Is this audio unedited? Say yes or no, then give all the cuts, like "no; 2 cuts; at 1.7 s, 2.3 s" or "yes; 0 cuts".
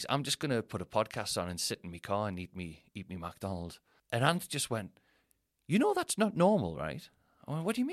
yes; 0 cuts